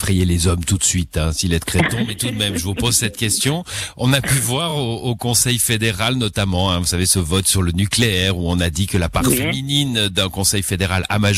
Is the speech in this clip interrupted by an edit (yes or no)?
no